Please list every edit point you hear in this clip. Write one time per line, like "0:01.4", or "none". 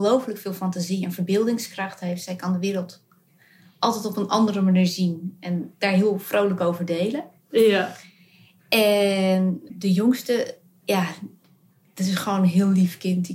0:09.7